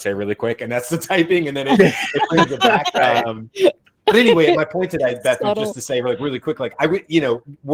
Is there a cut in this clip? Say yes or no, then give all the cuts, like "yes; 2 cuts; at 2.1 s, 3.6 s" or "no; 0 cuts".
yes; 1 cut; at 2.9 s